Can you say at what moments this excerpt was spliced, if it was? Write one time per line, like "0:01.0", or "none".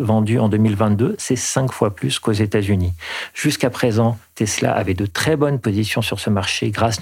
none